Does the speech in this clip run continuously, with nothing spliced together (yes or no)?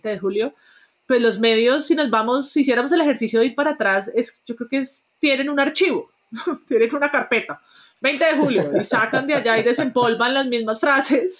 yes